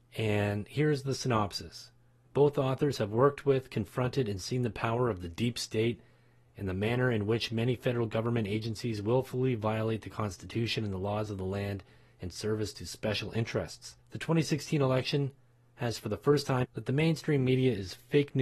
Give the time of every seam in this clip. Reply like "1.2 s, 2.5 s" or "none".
2.2 s, 14.0 s, 16.6 s